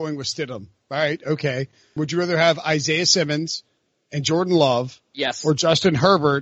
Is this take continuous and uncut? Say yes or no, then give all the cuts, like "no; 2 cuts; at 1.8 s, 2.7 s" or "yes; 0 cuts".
no; 1 cut; at 2.0 s